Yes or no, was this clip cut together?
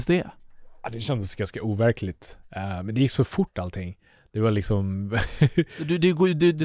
no